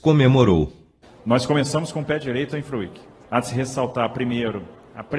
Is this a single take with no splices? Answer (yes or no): no